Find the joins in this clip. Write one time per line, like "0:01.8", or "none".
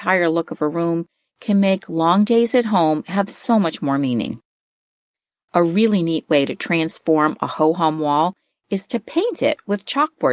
none